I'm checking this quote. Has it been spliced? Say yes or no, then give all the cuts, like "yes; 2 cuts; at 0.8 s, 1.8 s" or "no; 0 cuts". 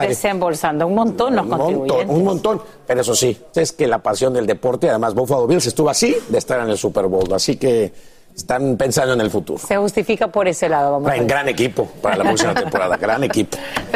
yes; 1 cut; at 3.5 s